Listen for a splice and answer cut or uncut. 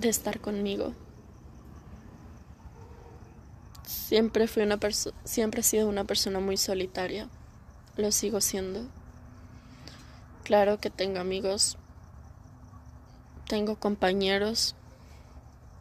uncut